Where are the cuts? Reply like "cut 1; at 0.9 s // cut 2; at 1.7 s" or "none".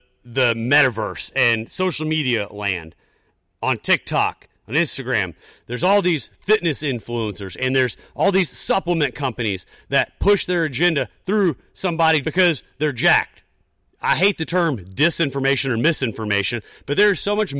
cut 1; at 12.2 s // cut 2; at 13.9 s